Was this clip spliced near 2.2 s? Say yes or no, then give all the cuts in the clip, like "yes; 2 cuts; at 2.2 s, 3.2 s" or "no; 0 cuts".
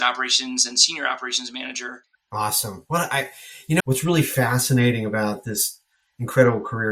yes; 2 cuts; at 2.2 s, 3.8 s